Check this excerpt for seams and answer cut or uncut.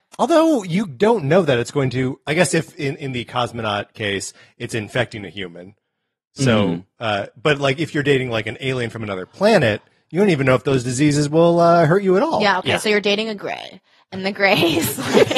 uncut